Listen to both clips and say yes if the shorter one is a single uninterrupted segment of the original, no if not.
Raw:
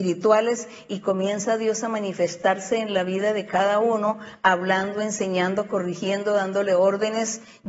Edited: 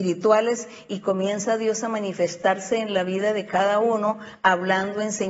yes